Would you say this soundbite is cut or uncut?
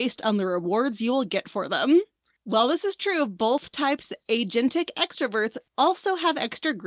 uncut